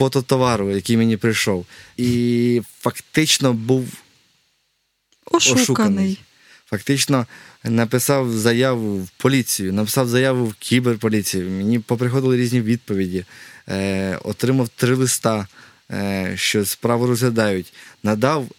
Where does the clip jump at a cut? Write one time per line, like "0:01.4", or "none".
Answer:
0:02.0